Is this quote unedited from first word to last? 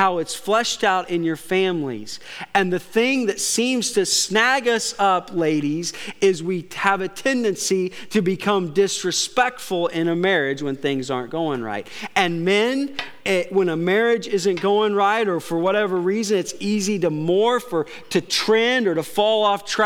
yes; 0 cuts

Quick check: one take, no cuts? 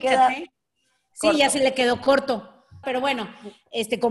no; 1 cut; at 2.8 s

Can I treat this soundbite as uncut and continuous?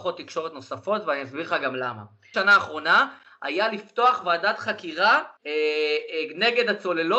no; 2 cuts; at 2.3 s, 5.4 s

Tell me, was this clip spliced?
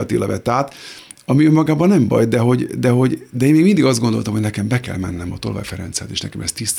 no; 0 cuts

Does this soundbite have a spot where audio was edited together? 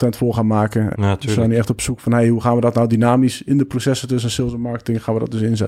yes; 1 cut; at 0.9 s

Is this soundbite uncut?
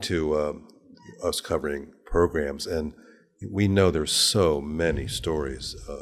yes; 0 cuts

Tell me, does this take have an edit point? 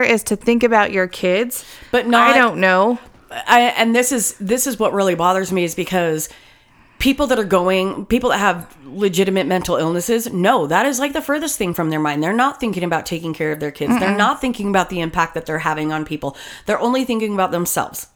no; 0 cuts

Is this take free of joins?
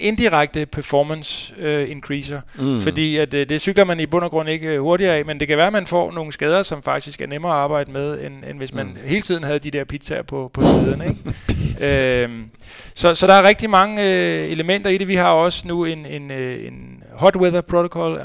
yes; 0 cuts

